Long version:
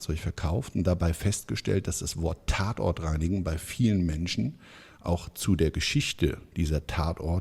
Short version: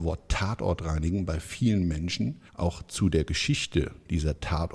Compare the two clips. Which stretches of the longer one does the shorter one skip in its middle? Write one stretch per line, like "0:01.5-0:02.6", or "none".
0:04.7-0:04.9